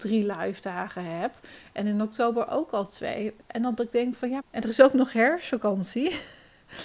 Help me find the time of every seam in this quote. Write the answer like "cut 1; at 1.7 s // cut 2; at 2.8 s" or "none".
cut 1; at 4.4 s